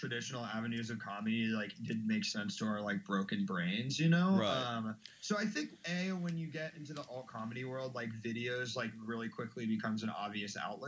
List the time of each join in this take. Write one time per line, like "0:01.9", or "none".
none